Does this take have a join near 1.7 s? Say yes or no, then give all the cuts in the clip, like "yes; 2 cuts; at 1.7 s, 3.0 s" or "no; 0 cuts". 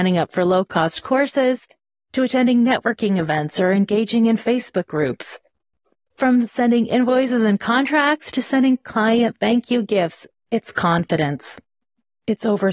no; 1 cut; at 10.3 s